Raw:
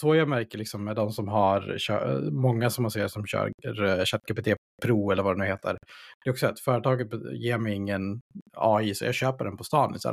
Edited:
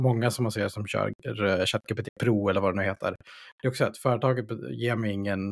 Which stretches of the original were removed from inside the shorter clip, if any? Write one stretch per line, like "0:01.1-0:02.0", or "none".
0:04.4-0:04.7